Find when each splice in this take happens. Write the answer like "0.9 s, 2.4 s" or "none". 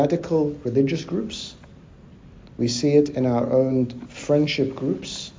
none